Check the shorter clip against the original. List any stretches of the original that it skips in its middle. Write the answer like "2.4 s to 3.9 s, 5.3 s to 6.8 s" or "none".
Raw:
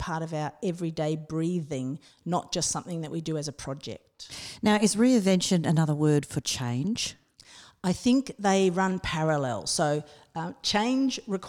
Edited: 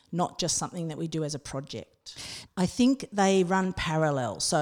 4.6 s to 7.7 s

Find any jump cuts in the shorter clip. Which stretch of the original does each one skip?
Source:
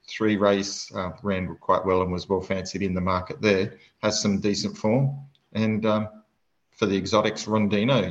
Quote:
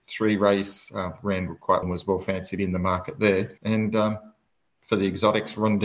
1.8 s to 2.0 s, 3.8 s to 5.5 s

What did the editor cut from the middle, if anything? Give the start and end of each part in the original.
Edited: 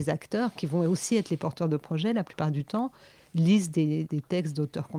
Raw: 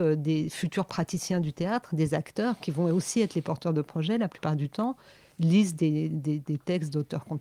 6.1 s to 6.4 s

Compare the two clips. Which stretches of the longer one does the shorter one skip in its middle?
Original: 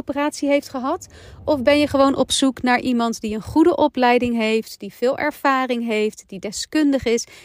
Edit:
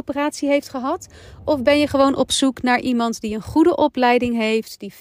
none

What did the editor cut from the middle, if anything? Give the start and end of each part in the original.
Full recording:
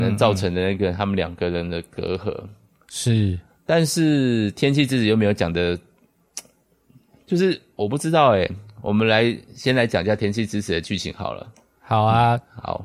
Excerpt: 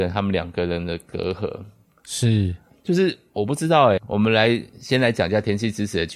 3.5 s to 7.1 s, 8.4 s to 8.7 s

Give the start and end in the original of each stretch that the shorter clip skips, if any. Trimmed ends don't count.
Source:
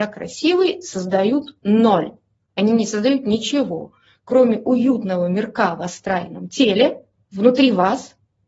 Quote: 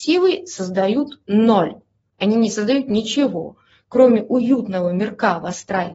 none

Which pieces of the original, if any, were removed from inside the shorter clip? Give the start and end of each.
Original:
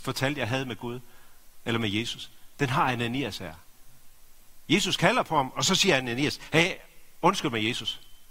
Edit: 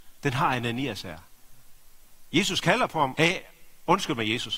5.5 s to 6.5 s

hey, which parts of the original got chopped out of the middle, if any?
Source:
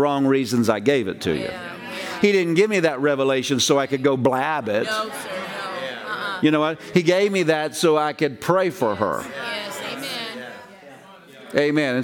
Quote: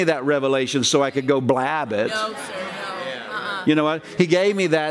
none

